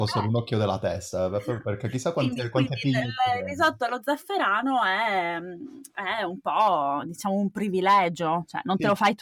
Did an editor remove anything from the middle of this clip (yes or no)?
no